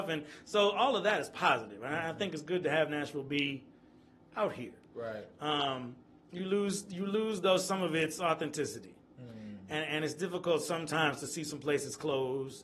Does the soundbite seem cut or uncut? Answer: uncut